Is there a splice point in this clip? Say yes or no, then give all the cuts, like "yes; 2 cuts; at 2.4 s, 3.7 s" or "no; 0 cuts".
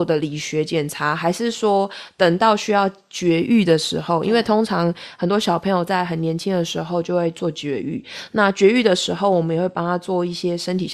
no; 0 cuts